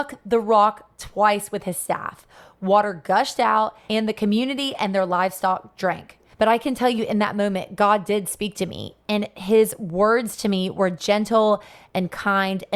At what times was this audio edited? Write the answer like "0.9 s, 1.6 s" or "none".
6.3 s